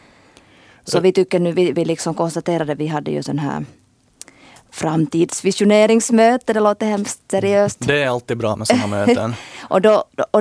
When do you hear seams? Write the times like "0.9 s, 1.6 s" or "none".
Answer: 1.7 s